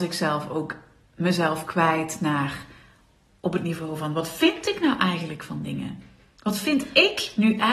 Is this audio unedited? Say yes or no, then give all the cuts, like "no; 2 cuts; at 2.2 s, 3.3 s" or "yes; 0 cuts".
yes; 0 cuts